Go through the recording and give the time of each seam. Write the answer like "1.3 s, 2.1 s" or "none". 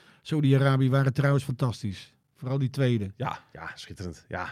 none